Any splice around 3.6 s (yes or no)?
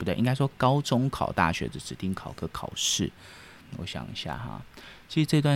yes